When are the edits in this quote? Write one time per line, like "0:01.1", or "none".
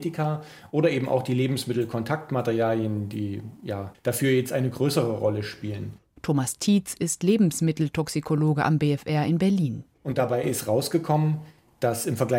0:03.9
0:06.2